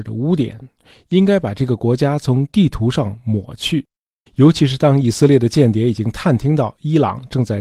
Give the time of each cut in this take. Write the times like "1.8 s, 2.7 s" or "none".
4.3 s